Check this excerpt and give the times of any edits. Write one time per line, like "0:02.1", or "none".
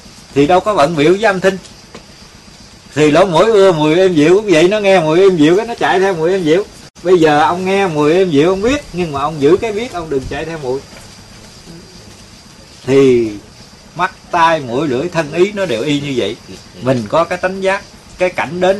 none